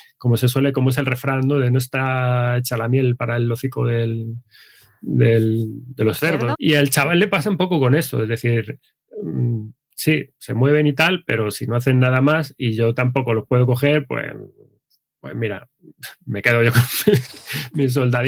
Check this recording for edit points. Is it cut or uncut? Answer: cut